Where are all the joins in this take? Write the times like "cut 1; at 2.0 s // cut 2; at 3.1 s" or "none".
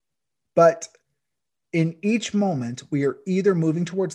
none